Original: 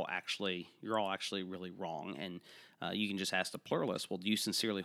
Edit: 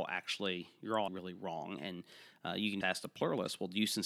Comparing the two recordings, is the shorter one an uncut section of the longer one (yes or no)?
no